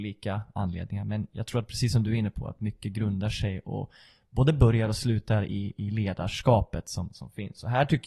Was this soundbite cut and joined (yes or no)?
no